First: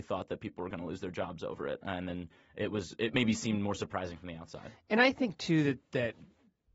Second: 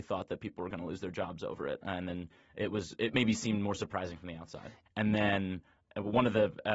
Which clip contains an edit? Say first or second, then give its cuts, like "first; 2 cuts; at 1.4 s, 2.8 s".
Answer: second; 1 cut; at 4.9 s